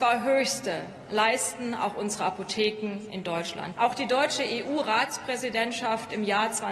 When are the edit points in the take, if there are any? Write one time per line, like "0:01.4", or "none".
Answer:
0:03.7